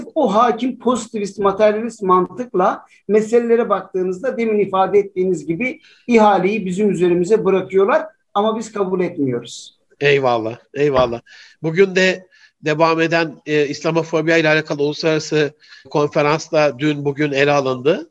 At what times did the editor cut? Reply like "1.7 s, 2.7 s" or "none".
none